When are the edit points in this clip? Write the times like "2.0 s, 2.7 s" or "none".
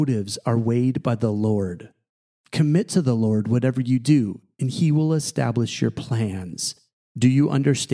none